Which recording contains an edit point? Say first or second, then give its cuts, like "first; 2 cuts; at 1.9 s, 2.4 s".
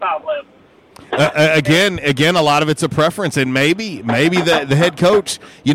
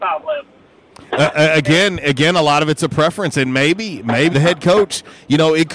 second; 1 cut; at 4.3 s